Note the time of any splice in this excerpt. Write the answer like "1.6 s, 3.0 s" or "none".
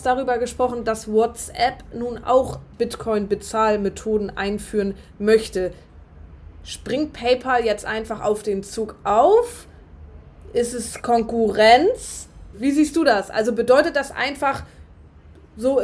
12.5 s